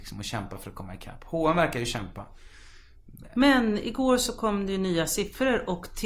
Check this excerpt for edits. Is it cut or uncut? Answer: cut